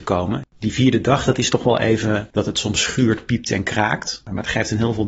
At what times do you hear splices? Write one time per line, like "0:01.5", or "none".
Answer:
none

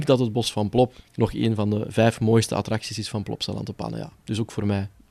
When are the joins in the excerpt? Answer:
none

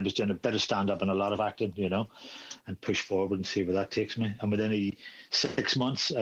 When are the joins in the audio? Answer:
0:02.6

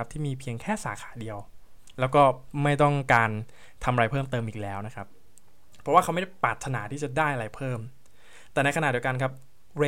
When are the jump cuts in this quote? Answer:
none

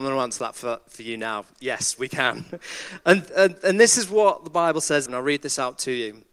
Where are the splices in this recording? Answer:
0:05.1

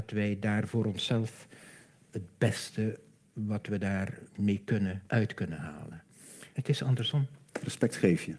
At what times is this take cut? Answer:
0:05.1
0:06.5

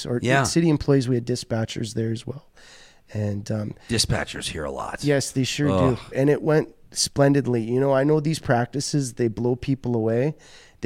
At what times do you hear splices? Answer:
0:06.1

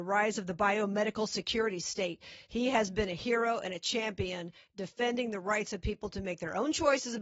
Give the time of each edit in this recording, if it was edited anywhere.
none

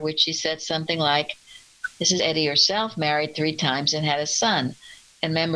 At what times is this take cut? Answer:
0:02.2

